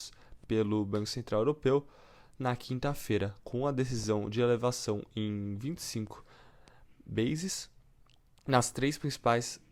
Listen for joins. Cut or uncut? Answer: uncut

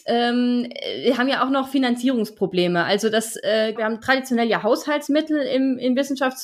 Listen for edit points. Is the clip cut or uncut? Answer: cut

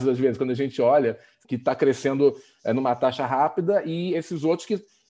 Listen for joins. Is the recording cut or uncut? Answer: cut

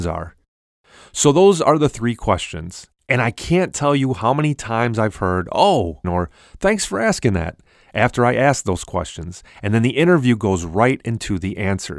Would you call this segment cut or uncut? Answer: cut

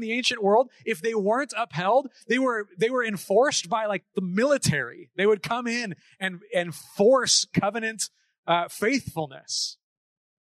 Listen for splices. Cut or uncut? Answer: uncut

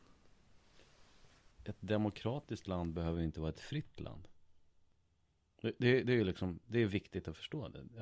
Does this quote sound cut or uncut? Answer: uncut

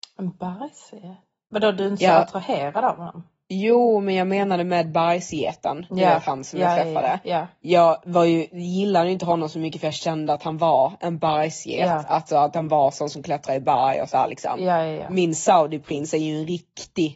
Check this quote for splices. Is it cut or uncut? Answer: uncut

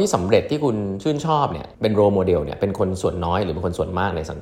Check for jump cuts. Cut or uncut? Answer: cut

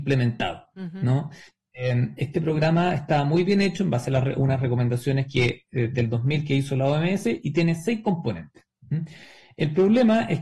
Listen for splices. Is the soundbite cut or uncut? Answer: uncut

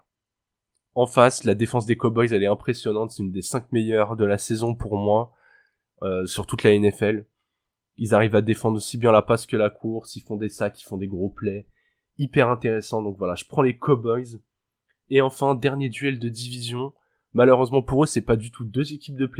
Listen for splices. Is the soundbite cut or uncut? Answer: uncut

